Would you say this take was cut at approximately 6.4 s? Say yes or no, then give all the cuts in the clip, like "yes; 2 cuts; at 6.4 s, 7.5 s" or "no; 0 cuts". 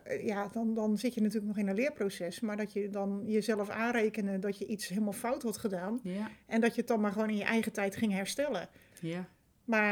no; 1 cut; at 8.9 s